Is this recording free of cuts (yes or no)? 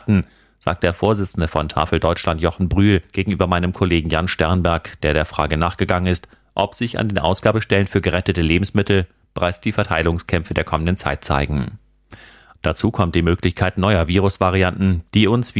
no